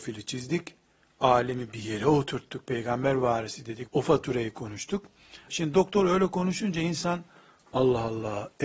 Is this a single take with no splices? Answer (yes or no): no